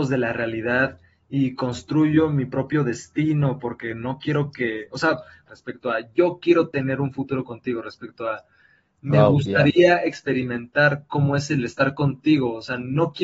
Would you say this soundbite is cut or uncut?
cut